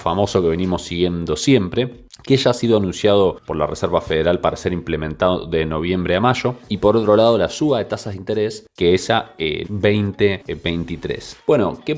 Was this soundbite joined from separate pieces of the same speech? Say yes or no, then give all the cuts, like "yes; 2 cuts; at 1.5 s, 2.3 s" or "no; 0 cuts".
yes; 2 cuts; at 6.7 s, 9.6 s